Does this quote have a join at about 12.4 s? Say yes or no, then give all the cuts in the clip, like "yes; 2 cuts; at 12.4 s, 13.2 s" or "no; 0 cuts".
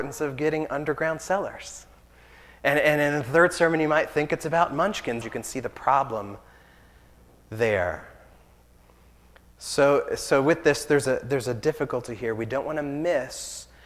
no; 1 cut; at 5.2 s